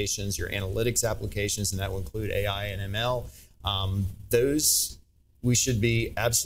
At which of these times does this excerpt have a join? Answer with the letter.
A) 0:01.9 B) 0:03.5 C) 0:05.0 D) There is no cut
D